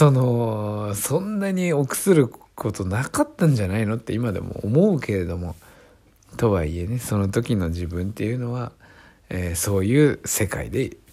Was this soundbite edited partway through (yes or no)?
no